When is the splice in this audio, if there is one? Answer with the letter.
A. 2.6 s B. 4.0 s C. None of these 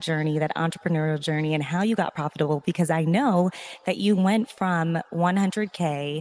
C